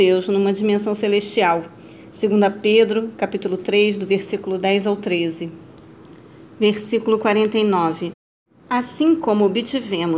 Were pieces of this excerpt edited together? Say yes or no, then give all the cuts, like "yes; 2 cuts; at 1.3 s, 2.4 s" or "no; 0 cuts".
no; 0 cuts